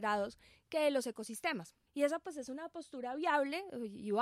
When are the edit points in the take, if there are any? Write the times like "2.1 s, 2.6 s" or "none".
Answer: 1.9 s